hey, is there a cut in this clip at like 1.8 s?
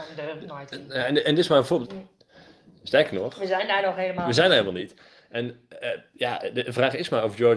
yes; 1 cut; at 1.8 s

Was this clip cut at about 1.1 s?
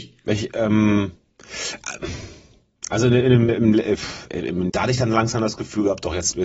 no; 2 cuts; at 3.5 s, 4.7 s

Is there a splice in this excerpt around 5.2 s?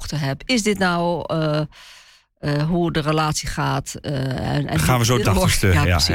yes; 1 cut; at 5.2 s

